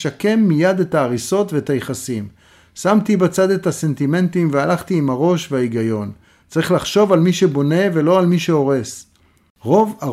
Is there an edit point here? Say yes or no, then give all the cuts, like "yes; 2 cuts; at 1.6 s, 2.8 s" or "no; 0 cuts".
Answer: no; 0 cuts